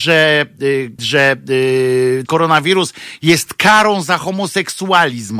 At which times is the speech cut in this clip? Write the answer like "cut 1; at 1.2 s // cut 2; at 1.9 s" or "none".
cut 1; at 1.0 s // cut 2; at 2.3 s